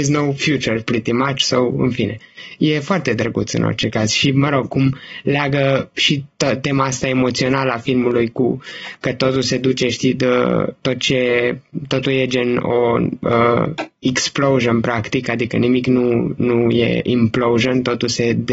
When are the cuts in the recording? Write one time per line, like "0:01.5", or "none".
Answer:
none